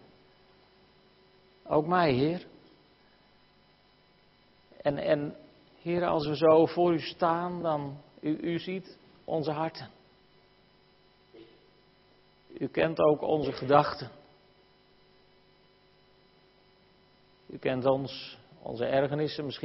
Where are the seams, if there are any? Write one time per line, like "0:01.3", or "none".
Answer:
none